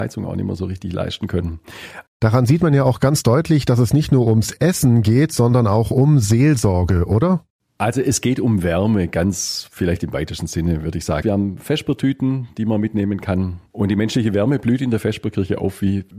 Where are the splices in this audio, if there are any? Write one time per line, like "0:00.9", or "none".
0:02.1
0:11.2
0:13.7